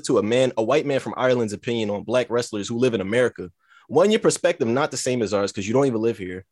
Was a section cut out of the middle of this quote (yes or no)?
no